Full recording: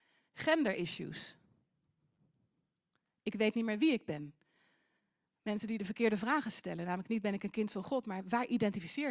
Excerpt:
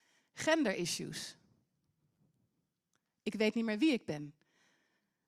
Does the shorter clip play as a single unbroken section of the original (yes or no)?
yes